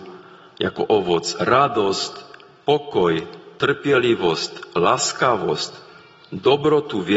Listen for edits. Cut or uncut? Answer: uncut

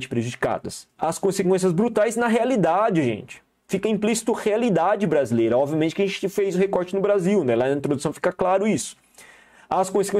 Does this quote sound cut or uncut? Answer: cut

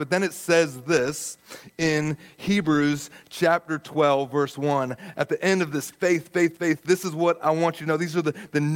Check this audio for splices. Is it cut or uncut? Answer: uncut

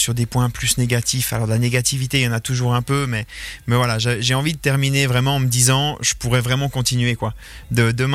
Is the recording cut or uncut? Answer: uncut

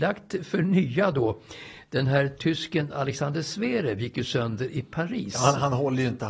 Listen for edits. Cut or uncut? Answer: uncut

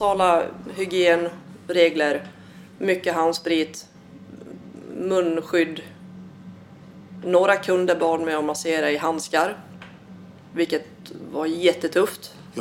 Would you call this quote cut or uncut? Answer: uncut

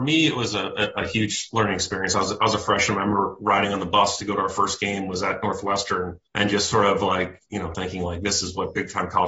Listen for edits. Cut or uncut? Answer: cut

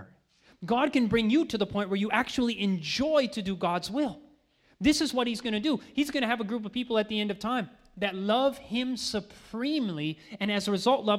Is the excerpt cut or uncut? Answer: uncut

